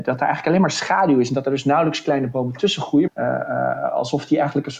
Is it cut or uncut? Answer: cut